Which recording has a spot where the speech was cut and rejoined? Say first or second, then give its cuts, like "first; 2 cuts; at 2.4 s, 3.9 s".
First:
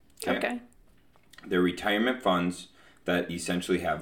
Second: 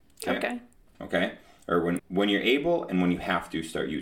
second; 2 cuts; at 0.9 s, 2.0 s